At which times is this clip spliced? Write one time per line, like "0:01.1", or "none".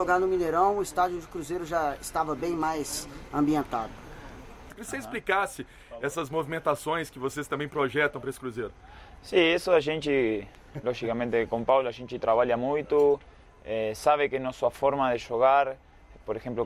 0:04.7